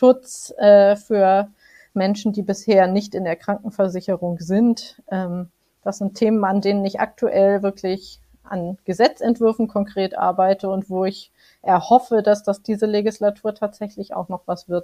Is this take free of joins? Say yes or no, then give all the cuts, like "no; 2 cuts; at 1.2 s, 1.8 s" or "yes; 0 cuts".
yes; 0 cuts